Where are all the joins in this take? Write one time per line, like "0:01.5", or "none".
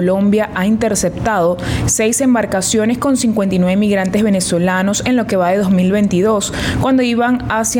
none